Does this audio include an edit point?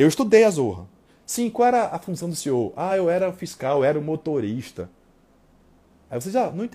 no; 0 cuts

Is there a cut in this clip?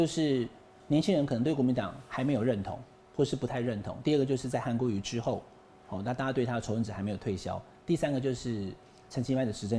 no; 0 cuts

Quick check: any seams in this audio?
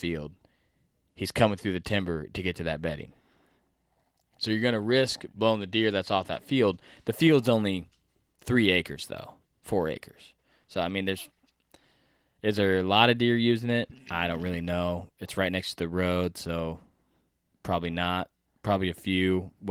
no; 0 cuts

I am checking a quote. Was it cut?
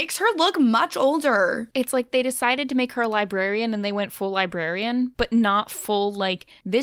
yes; 1 cut; at 1.7 s

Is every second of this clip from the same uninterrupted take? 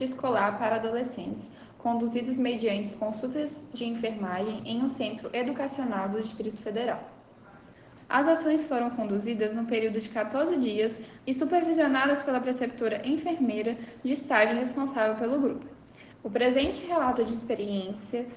no; 3 cuts; at 8.0 s, 11.2 s, 16.1 s

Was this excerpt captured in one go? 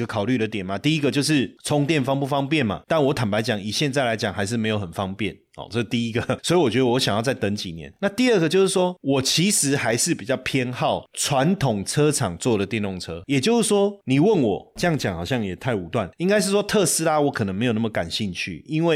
yes; 0 cuts

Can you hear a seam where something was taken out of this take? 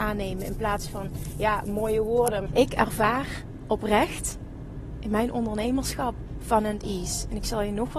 yes; 1 cut; at 2.5 s

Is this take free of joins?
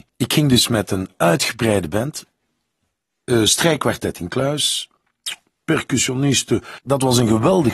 yes; 0 cuts

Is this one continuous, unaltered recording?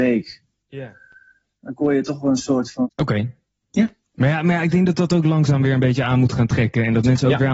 no; 2 cuts; at 1.6 s, 2.8 s

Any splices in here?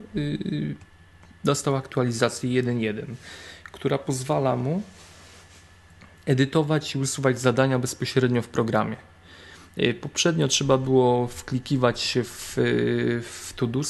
no; 0 cuts

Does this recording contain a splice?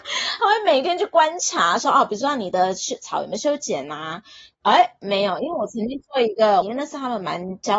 yes; 2 cuts; at 4.5 s, 6.6 s

